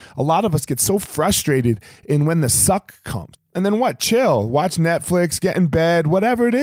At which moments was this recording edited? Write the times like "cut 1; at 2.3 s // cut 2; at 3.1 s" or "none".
cut 1; at 3.3 s